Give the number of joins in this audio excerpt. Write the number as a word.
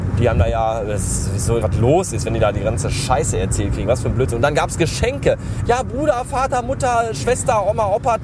two